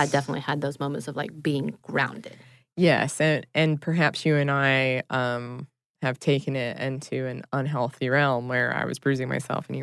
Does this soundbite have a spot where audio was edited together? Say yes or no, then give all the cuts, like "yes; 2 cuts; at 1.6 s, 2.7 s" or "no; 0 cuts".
no; 0 cuts